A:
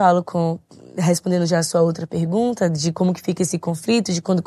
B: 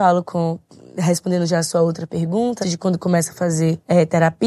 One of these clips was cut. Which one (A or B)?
B